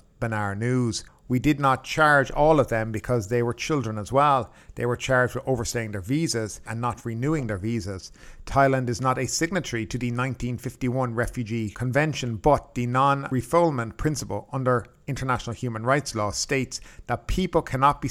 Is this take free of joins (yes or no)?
no